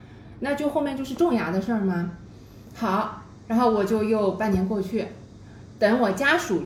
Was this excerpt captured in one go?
yes; 0 cuts

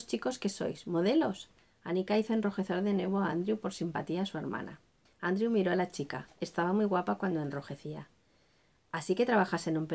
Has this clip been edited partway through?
yes; 1 cut; at 5.0 s

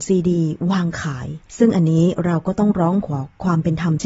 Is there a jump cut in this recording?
yes; 1 cut; at 1.5 s

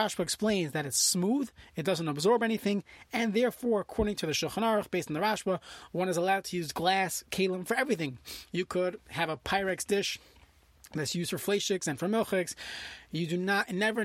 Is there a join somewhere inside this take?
no; 0 cuts

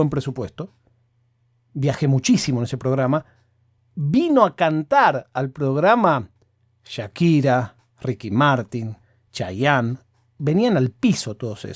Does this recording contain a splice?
no; 0 cuts

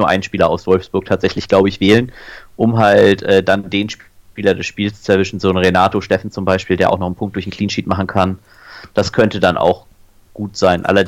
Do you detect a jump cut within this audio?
no; 0 cuts

